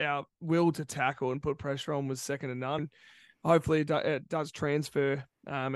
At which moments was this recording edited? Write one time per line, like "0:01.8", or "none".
0:02.8